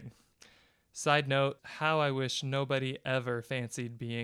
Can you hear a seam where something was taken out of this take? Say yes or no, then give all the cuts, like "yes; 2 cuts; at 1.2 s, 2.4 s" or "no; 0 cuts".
yes; 1 cut; at 1.6 s